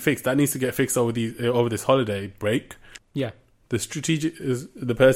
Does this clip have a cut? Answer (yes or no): yes